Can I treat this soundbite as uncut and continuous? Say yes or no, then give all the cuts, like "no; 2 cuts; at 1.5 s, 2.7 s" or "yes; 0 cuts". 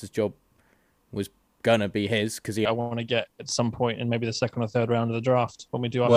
no; 1 cut; at 2.7 s